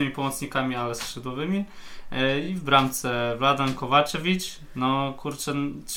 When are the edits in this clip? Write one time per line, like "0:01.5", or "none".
none